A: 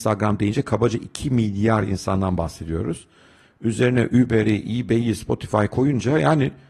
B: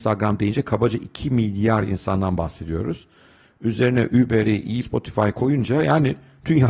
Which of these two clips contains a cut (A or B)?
B